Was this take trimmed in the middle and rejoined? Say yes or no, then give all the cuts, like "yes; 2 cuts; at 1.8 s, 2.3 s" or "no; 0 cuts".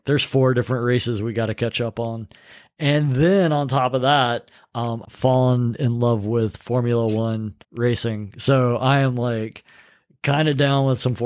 yes; 2 cuts; at 5.0 s, 7.6 s